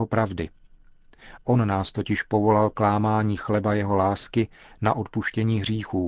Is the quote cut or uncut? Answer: cut